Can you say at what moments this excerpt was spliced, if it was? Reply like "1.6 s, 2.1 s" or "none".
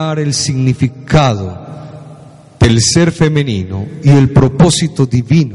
none